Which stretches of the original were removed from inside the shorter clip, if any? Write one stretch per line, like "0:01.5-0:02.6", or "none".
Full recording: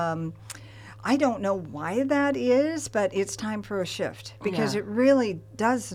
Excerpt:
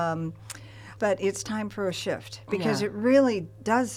0:01.0-0:02.9

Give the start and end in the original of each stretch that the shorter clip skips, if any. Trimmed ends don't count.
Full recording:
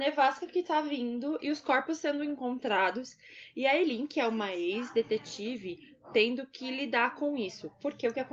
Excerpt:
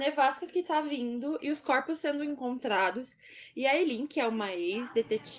none

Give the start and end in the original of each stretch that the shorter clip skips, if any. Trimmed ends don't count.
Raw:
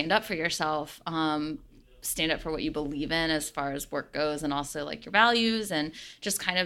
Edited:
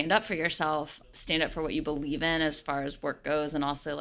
0:01.0-0:01.9

